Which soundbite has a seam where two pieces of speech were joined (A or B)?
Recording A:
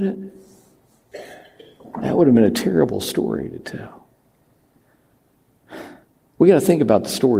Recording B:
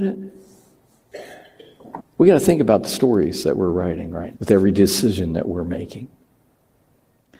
B